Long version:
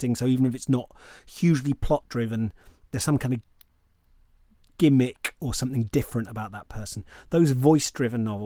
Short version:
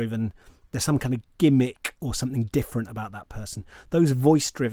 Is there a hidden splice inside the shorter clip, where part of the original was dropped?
yes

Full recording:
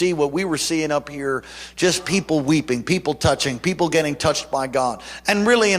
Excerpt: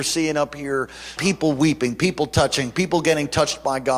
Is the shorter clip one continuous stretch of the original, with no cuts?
no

